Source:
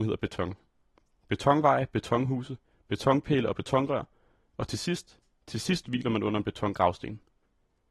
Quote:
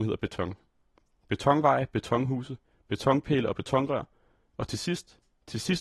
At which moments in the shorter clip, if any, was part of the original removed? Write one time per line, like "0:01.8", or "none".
none